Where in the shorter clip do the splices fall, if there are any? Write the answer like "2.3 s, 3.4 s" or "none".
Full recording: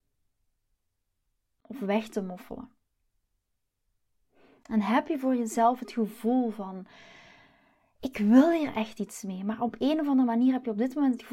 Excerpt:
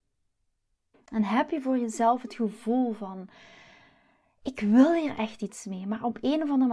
0.9 s